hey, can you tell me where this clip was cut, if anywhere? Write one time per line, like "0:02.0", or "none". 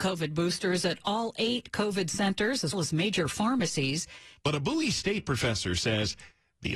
0:02.7
0:04.4